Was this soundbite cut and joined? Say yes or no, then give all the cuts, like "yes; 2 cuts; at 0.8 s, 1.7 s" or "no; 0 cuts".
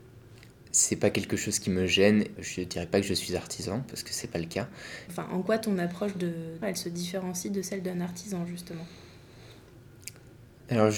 yes; 3 cuts; at 2.4 s, 5.1 s, 6.6 s